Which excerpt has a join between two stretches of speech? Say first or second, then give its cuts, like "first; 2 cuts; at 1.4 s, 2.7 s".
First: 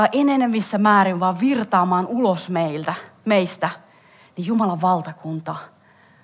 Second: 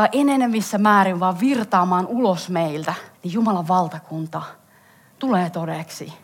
second; 1 cut; at 3.1 s